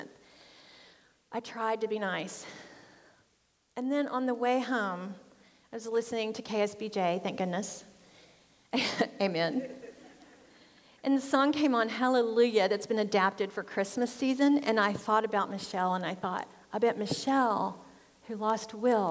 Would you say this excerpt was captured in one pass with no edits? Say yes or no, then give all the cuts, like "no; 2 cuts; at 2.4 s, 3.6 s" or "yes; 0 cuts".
yes; 0 cuts